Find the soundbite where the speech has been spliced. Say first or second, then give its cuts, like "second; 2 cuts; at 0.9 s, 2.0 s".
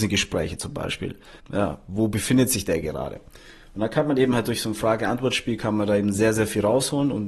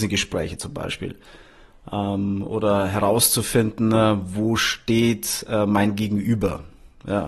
first; 1 cut; at 1.4 s